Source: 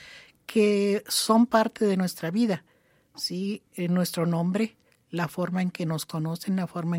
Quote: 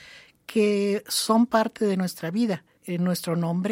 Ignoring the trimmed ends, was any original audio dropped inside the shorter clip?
yes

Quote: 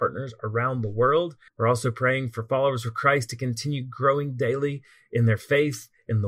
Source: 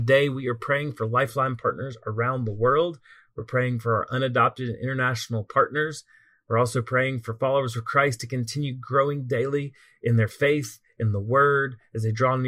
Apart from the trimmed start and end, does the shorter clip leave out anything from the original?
yes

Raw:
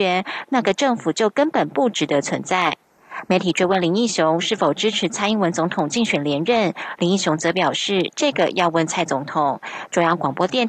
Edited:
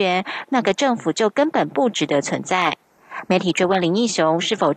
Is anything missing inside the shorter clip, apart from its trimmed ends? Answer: no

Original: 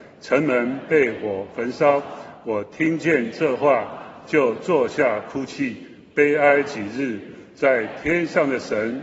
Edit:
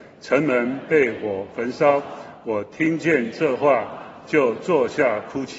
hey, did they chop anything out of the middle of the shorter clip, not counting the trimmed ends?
no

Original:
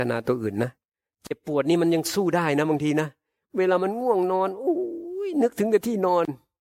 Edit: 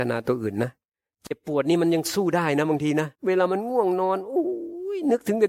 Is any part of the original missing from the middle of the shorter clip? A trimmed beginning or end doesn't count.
yes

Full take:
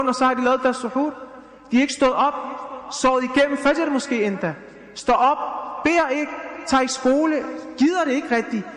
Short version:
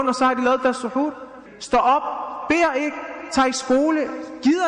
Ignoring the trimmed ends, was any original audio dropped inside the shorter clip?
yes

